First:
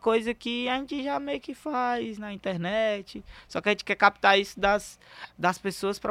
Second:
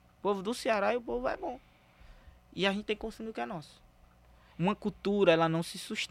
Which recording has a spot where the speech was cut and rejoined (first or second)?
second